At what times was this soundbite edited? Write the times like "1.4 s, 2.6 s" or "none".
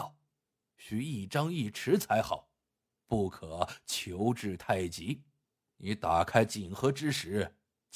5.7 s

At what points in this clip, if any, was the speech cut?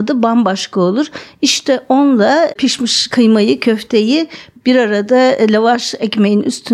none

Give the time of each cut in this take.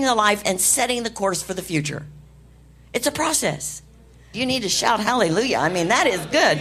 4.3 s

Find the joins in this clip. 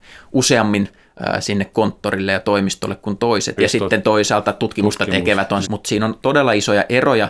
3.6 s, 5.6 s

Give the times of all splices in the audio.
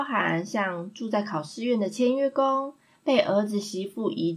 none

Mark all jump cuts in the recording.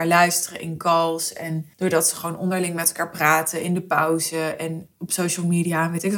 1.7 s

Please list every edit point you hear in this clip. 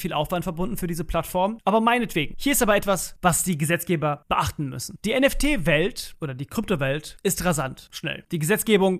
none

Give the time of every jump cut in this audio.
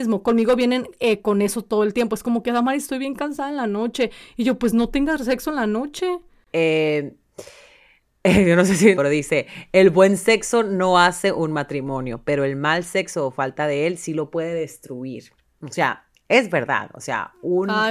6.5 s, 8.9 s

